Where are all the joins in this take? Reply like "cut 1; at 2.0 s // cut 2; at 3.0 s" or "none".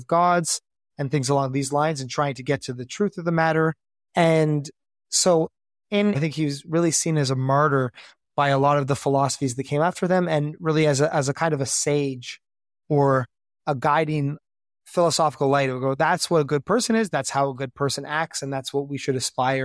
cut 1; at 6.1 s